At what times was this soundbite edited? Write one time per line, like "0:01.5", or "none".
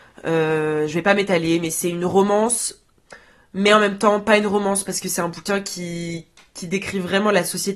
none